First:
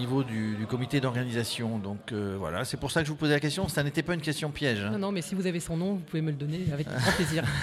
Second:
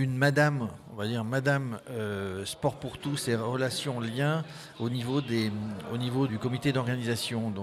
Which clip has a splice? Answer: second; 1 cut; at 6.3 s

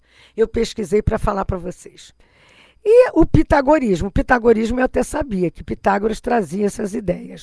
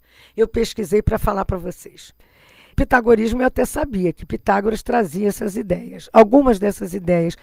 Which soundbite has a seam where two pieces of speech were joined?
second; 1 cut; at 2.7 s

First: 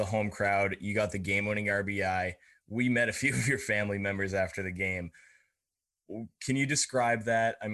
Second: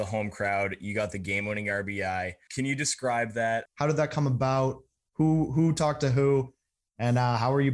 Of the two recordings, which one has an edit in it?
second; 2 cuts; at 2.5 s, 3.7 s

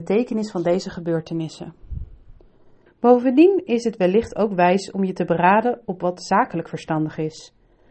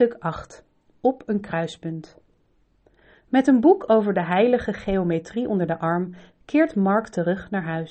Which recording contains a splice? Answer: first; 1 cut; at 2.9 s

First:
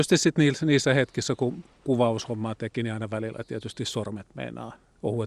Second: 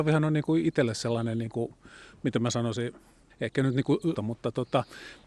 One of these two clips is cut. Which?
second; 1 cut; at 4.1 s

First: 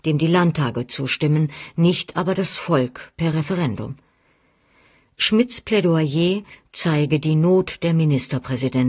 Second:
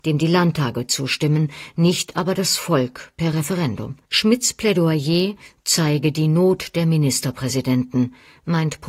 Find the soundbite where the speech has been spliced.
second; 1 cut; at 4.0 s

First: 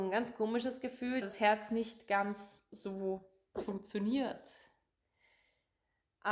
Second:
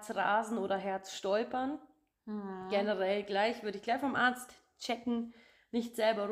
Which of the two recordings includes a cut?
first; 1 cut; at 1.2 s

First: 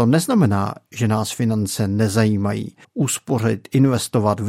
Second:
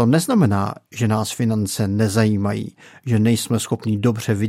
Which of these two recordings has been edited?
first; 1 cut; at 2.8 s

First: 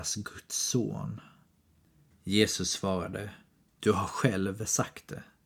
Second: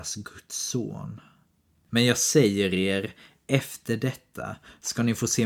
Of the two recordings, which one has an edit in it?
second; 1 cut; at 1.9 s

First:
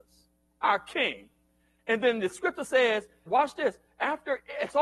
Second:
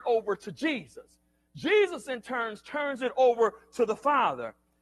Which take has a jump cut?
first; 1 cut; at 3.3 s

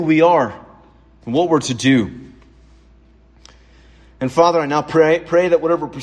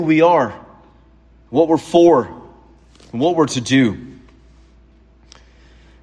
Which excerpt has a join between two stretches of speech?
first; 1 cut; at 1.2 s

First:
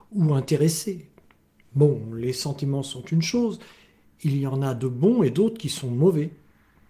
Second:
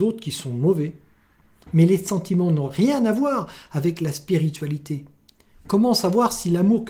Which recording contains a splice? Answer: second; 1 cut; at 5.5 s

